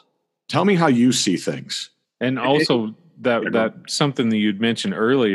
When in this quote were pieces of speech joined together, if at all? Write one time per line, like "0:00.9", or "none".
0:02.1